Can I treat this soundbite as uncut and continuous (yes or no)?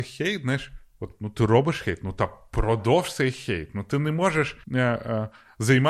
no